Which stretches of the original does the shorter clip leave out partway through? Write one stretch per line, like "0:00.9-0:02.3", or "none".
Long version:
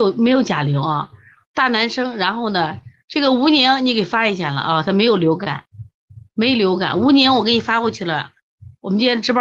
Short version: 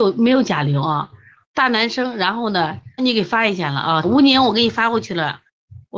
0:03.0-0:03.8
0:04.8-0:06.9